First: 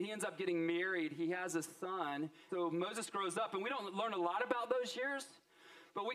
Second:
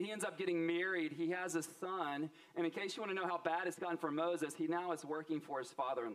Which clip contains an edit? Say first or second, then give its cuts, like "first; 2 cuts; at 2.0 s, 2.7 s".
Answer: first; 1 cut; at 2.5 s